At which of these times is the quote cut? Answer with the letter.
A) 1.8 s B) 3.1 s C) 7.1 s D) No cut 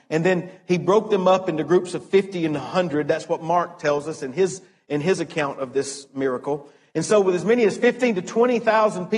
D